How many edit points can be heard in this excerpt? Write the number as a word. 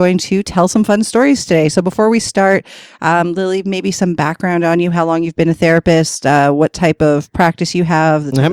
zero